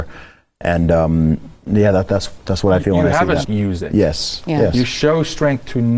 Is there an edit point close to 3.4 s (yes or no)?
yes